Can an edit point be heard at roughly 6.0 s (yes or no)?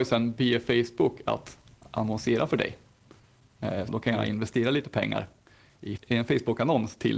yes